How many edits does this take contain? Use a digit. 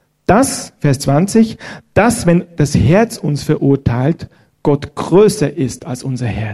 0